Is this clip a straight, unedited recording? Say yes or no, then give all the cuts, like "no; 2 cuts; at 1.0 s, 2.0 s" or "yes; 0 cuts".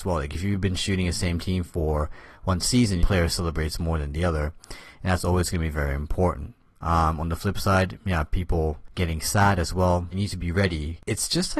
no; 2 cuts; at 3.0 s, 10.1 s